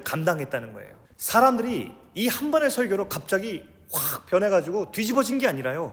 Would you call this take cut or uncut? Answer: cut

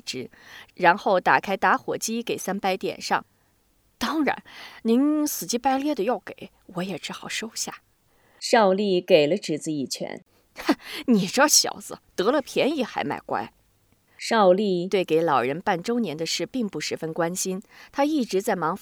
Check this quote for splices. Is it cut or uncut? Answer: uncut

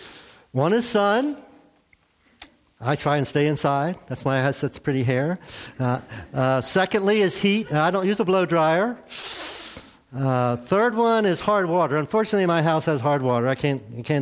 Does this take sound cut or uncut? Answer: uncut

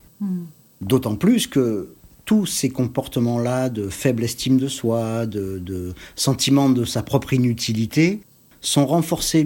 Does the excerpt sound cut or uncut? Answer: uncut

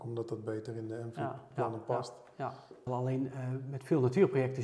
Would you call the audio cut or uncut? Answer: cut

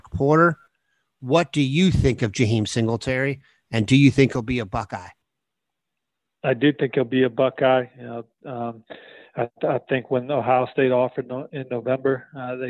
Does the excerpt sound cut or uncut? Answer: uncut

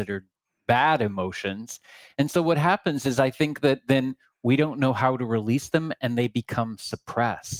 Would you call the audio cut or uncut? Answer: uncut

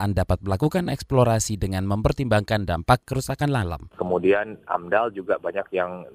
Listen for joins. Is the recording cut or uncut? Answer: uncut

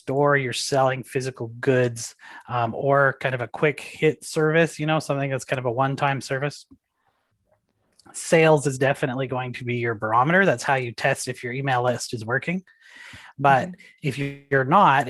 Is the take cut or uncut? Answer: uncut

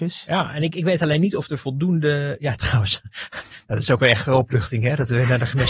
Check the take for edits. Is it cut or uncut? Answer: uncut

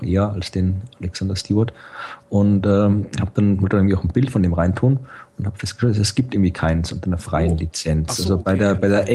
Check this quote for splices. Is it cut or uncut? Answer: uncut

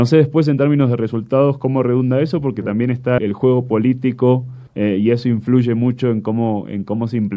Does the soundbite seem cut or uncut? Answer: cut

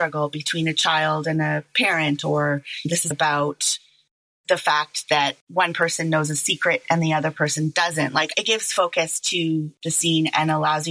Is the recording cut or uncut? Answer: cut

